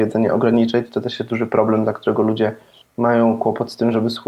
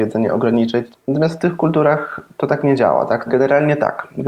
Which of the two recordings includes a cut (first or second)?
second